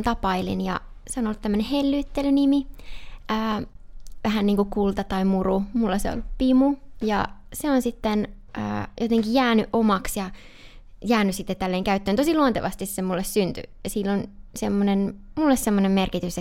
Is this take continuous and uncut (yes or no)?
yes